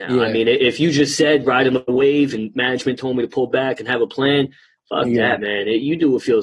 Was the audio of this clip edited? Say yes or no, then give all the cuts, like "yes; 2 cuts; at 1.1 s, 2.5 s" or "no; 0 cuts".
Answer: no; 0 cuts